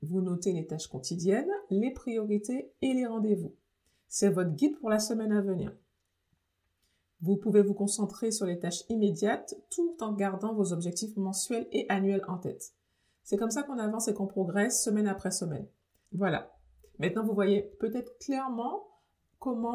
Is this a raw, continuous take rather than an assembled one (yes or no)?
no